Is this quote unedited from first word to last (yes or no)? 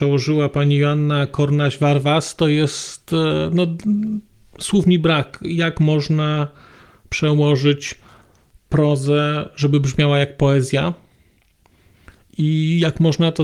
yes